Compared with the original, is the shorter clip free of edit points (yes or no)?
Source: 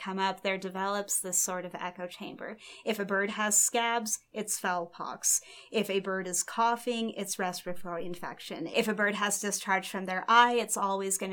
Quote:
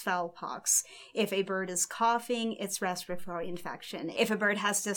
yes